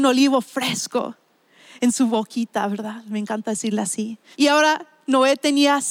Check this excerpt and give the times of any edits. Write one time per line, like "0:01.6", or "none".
0:04.3

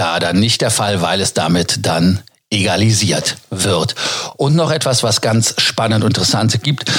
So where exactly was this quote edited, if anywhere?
none

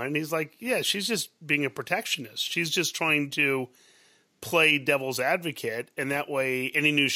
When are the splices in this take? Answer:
none

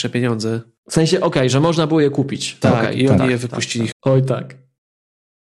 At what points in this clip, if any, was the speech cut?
0:03.9

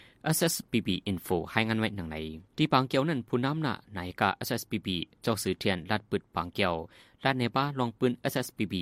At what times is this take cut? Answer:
0:02.5

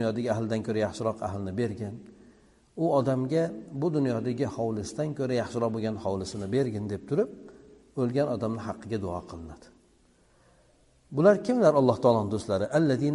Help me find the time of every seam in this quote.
none

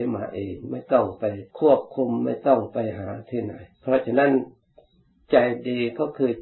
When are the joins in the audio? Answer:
0:01.5
0:03.7

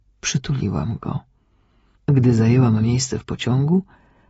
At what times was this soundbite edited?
0:02.0

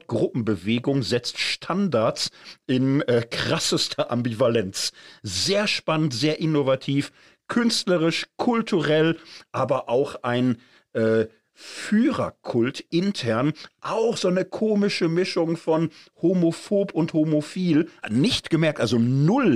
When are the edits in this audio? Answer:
0:18.0

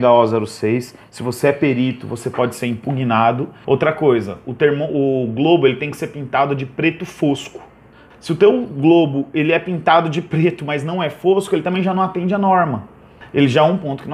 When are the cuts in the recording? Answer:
0:03.6

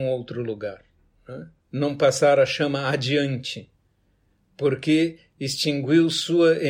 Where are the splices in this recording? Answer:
0:01.6

